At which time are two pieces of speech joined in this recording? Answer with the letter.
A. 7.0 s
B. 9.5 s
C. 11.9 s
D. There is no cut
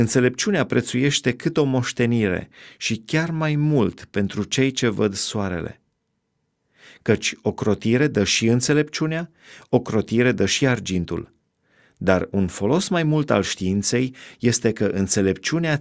D